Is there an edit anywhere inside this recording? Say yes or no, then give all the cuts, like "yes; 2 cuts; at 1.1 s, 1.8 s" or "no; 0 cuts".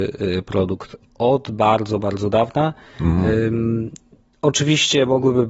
no; 0 cuts